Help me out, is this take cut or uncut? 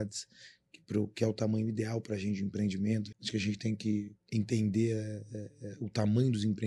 cut